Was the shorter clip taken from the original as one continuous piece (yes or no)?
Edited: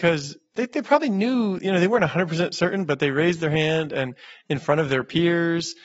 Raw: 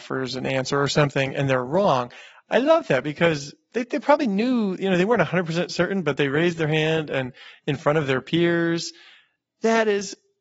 yes